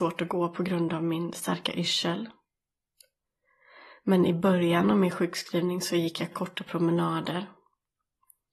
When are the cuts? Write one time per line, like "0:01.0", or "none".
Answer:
0:06.3

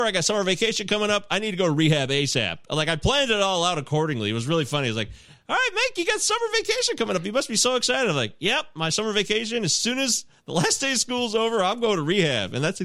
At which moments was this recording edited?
none

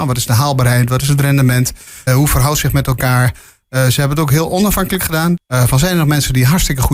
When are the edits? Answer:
0:02.1
0:05.4

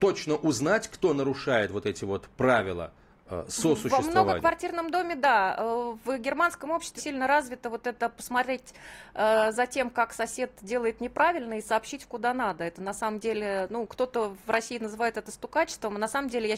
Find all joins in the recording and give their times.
0:07.0

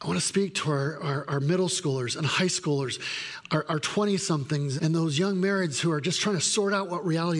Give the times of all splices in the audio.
0:04.8

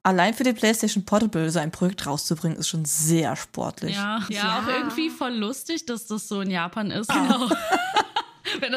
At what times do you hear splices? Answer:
0:04.3
0:07.1

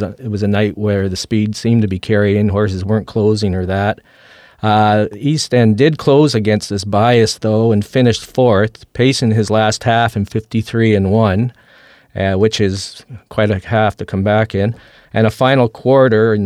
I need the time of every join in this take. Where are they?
none

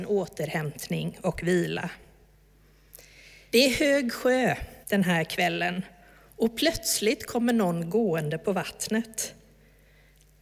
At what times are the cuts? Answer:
0:03.5
0:04.8

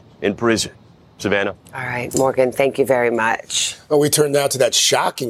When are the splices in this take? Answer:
none

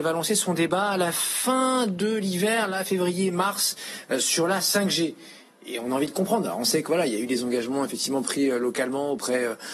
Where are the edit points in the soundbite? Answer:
none

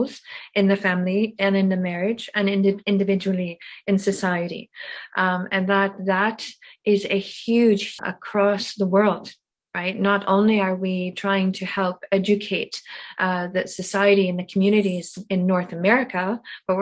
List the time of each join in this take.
0:08.0

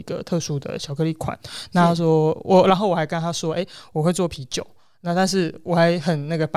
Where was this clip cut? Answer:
none

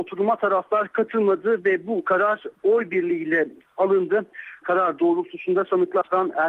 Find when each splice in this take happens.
0:04.6

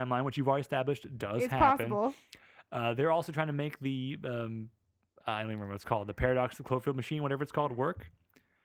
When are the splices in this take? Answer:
none

